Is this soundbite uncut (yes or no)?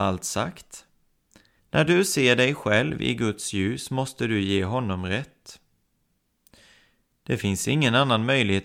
no